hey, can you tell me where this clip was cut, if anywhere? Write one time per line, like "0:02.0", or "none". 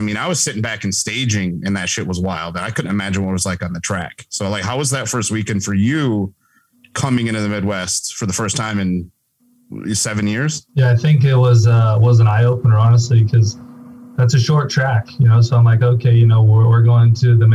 0:10.7